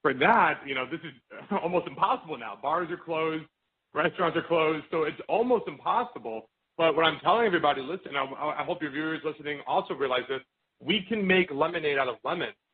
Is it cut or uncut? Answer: uncut